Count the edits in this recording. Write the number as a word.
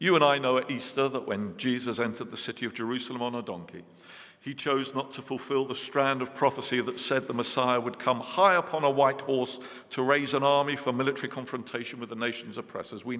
zero